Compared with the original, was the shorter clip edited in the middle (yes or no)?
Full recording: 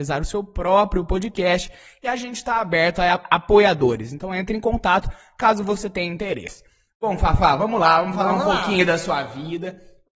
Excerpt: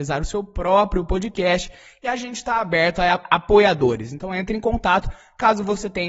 no